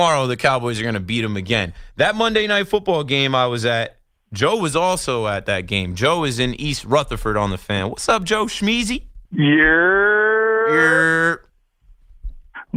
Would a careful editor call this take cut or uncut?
cut